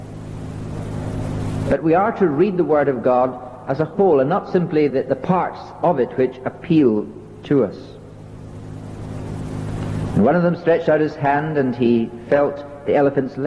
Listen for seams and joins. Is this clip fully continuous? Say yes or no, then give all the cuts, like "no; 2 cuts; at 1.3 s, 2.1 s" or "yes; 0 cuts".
no; 2 cuts; at 4.9 s, 10.1 s